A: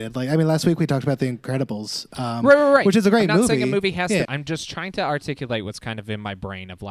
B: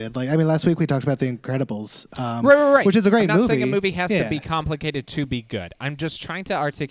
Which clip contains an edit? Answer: A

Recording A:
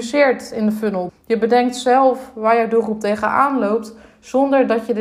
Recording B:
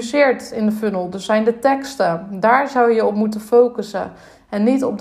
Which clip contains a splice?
A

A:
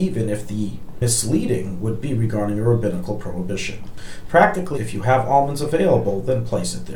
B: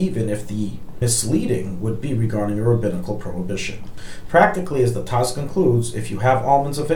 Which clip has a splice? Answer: A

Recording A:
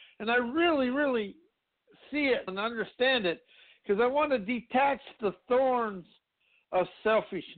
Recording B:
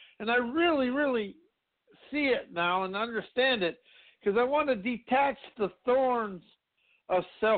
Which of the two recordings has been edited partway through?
A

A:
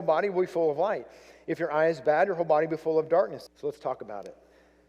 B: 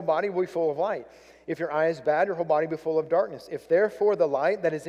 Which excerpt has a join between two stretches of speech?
A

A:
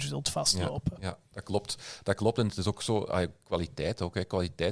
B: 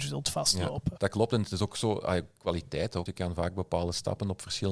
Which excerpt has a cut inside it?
B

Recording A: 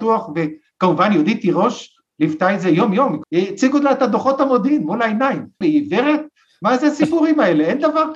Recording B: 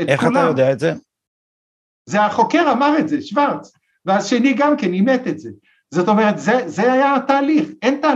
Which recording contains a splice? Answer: A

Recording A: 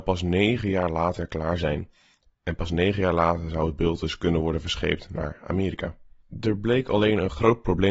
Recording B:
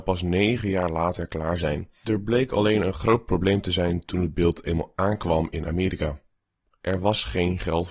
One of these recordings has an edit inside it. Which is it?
B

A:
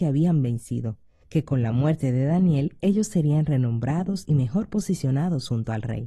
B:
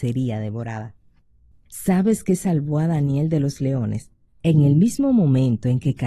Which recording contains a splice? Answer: B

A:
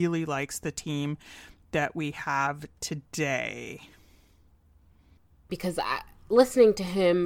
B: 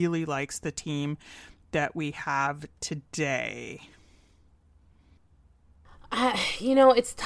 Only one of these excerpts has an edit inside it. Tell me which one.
A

